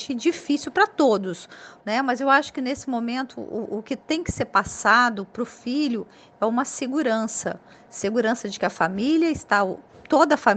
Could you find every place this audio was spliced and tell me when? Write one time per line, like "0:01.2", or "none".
0:01.8